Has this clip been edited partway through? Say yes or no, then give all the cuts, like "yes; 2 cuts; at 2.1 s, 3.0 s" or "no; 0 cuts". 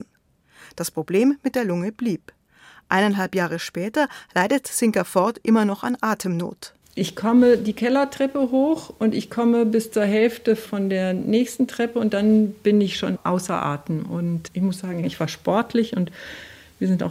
no; 0 cuts